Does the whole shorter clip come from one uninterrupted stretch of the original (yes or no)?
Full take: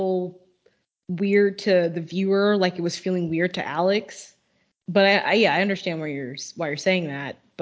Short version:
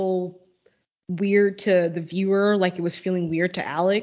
yes